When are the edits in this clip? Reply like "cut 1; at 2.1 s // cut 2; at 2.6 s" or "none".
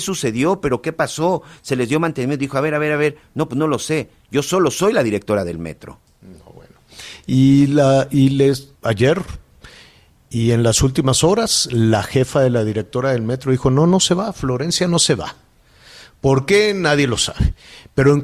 cut 1; at 6.0 s // cut 2; at 8.7 s